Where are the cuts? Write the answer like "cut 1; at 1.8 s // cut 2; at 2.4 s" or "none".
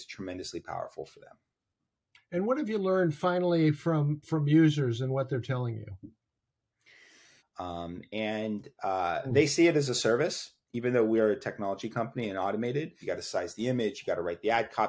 cut 1; at 7.4 s // cut 2; at 13.0 s